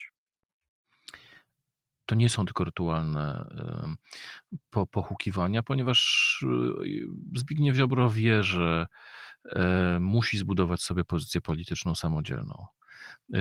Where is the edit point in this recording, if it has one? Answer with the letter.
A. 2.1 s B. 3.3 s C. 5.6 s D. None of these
A